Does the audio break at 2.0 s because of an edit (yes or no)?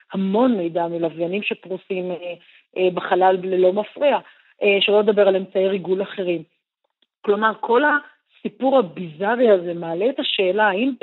no